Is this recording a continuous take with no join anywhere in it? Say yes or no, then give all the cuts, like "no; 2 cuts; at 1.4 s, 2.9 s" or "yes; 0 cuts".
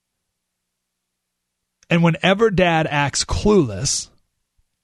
yes; 0 cuts